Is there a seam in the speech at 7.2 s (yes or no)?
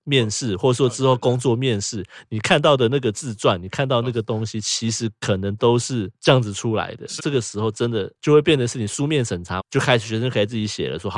yes